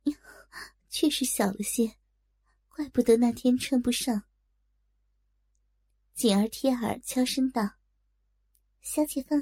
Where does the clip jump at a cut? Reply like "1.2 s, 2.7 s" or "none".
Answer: 4.5 s